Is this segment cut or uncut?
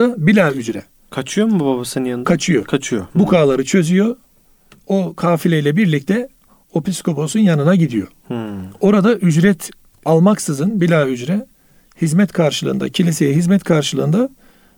uncut